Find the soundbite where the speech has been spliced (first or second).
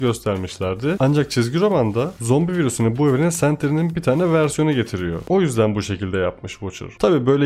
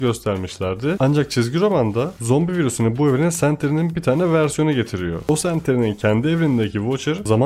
first